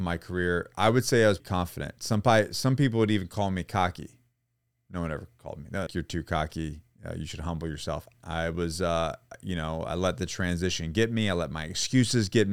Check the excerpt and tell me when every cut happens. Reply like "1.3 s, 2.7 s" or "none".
1.4 s, 5.9 s, 8.1 s